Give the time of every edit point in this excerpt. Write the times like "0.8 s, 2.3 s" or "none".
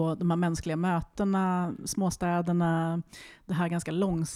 none